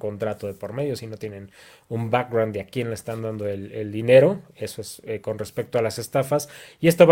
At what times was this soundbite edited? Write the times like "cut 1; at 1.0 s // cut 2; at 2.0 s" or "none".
none